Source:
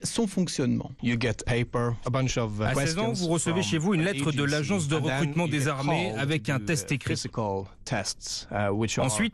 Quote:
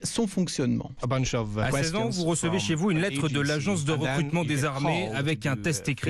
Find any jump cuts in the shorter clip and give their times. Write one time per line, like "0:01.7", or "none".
0:01.0